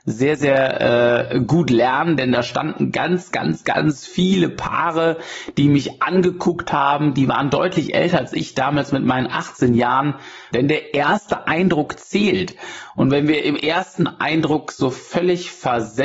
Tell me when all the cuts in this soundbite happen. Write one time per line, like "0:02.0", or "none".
0:03.3
0:10.5